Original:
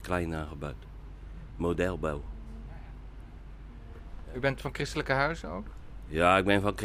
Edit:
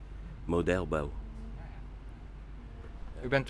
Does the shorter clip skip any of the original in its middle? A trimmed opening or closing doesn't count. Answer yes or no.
no